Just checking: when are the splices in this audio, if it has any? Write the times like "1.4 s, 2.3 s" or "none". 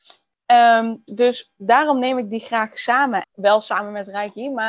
1.1 s, 3.2 s